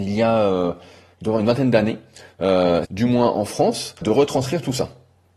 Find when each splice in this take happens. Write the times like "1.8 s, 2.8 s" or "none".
2.8 s, 4.0 s